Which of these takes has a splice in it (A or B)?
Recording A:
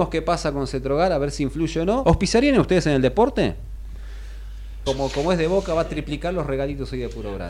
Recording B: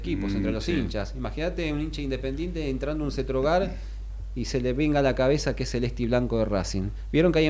A